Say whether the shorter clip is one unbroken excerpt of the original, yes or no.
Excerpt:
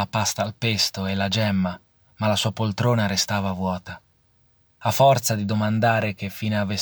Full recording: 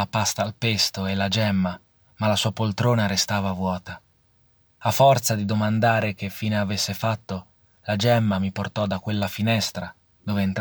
yes